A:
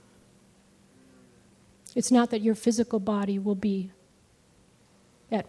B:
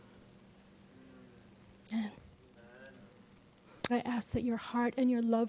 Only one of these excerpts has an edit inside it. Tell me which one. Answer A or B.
B